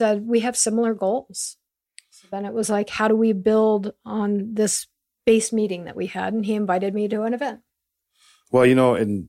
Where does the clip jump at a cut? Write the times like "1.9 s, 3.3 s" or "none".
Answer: none